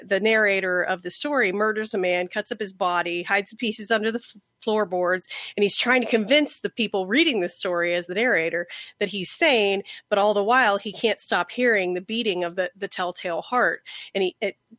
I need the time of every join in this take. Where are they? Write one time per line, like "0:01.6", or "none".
none

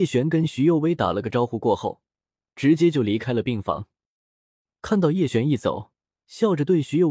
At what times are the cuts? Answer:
0:06.2

